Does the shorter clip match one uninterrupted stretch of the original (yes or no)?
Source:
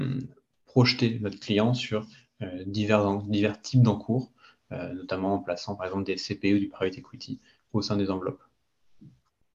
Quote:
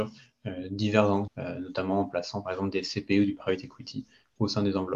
no